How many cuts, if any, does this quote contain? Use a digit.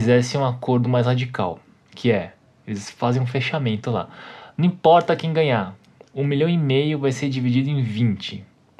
0